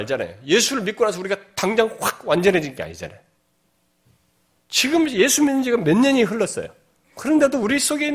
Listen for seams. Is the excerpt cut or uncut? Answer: uncut